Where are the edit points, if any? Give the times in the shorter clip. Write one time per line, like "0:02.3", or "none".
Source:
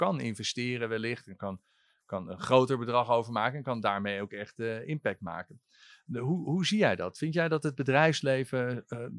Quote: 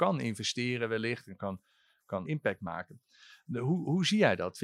0:02.3